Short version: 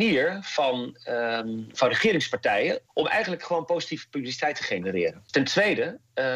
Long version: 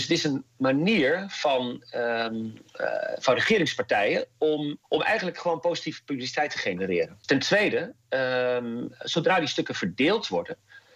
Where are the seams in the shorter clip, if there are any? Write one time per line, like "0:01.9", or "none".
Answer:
0:01.7
0:02.9